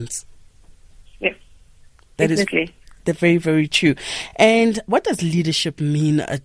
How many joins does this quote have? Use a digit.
0